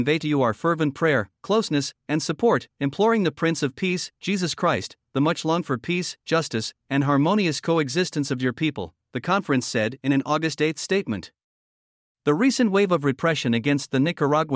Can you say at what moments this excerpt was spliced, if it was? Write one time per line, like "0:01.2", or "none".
none

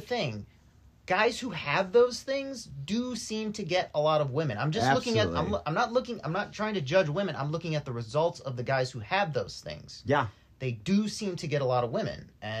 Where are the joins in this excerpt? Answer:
none

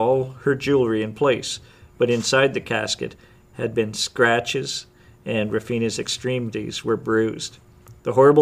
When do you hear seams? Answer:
none

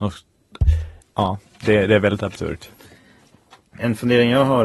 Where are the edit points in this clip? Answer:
0:01.0

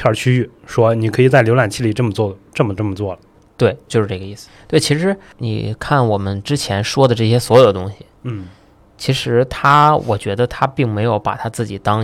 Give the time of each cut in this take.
none

